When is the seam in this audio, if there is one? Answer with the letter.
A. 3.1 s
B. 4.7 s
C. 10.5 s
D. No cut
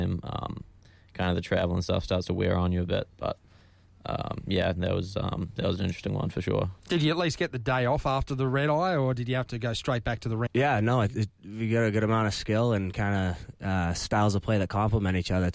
C